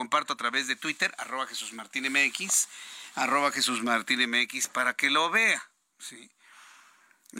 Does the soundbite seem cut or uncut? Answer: uncut